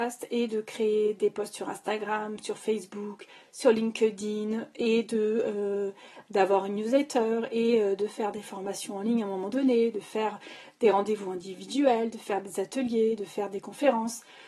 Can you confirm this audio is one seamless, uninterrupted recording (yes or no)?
yes